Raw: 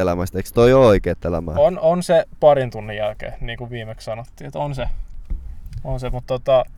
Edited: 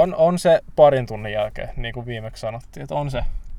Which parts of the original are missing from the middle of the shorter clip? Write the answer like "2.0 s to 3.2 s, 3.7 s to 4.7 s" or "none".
none